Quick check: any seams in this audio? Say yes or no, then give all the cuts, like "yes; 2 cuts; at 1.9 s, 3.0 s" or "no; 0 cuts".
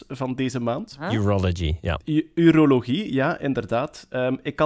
no; 0 cuts